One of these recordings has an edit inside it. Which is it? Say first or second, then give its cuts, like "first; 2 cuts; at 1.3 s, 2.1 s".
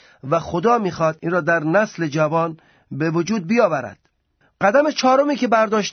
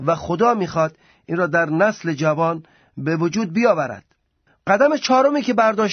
first; 1 cut; at 1.2 s